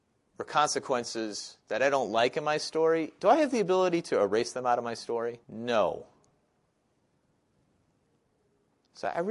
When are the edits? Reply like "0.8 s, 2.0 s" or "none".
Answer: 5.4 s